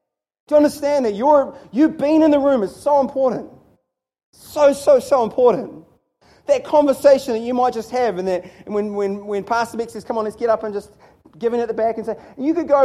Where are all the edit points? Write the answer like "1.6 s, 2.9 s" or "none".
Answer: none